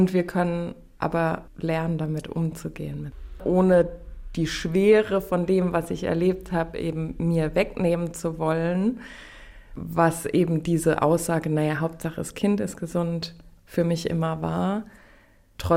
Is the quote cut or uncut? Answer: uncut